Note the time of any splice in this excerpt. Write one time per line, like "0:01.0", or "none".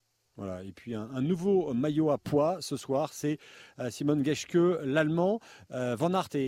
none